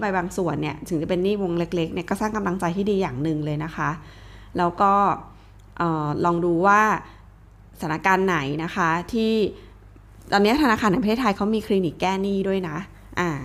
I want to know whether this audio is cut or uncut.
uncut